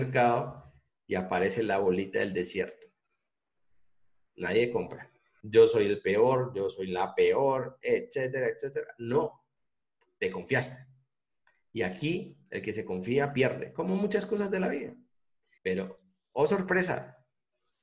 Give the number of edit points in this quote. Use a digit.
2